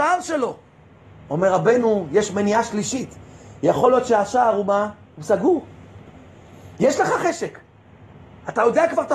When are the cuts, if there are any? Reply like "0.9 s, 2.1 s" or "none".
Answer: none